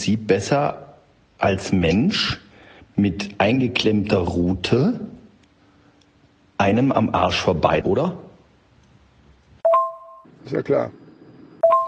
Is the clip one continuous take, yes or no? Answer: no